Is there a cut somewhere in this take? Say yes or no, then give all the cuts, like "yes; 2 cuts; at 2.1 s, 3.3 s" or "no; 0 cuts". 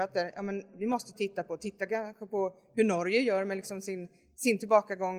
no; 0 cuts